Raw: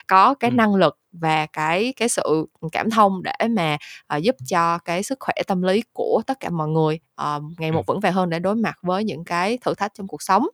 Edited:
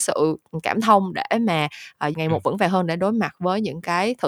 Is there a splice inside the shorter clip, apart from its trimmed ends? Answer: yes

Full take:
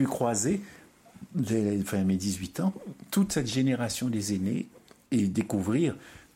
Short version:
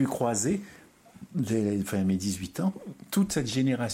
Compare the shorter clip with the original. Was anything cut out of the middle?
no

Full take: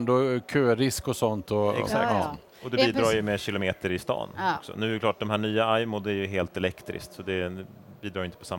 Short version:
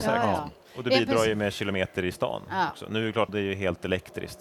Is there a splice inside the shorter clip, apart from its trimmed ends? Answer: yes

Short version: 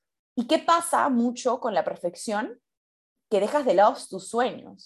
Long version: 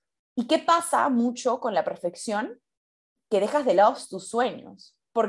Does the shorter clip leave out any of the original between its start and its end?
no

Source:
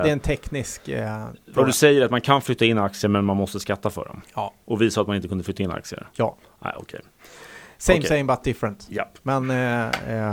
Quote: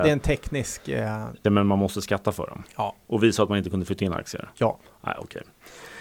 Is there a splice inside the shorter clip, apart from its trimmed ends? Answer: yes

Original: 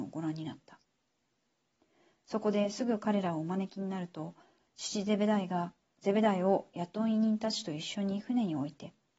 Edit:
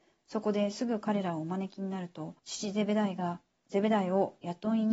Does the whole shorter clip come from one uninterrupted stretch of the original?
no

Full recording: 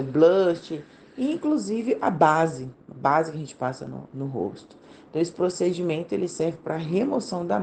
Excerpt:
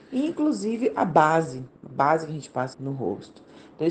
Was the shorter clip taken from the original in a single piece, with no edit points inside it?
no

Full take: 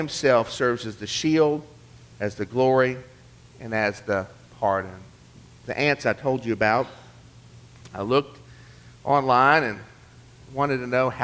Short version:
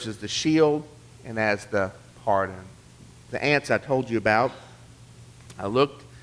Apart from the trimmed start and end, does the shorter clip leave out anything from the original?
yes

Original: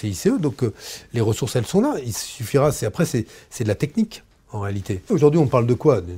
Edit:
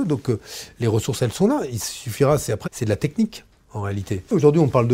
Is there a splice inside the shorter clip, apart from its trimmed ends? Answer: yes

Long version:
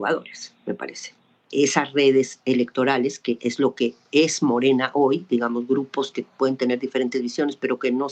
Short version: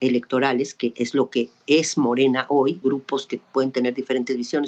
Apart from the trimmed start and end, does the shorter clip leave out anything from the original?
yes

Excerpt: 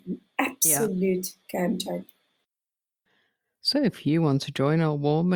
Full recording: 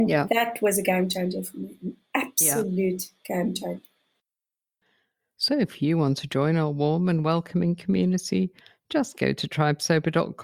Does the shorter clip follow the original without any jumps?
yes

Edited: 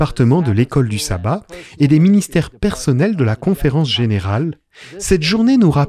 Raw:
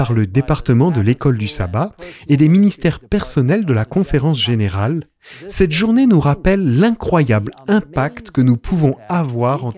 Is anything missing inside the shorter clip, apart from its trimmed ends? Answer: no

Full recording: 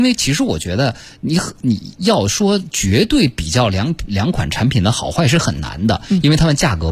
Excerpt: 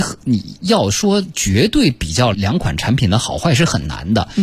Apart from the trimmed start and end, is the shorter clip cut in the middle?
yes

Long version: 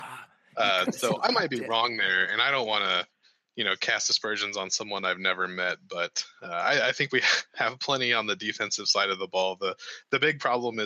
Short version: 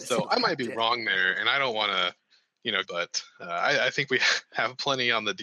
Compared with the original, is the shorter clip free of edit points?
no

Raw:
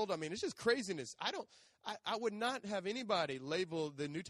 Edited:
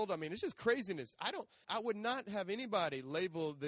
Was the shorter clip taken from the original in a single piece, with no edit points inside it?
no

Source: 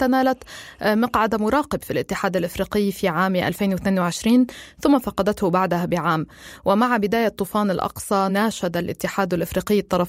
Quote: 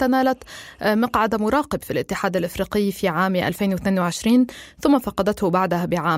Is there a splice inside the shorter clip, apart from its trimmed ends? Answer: no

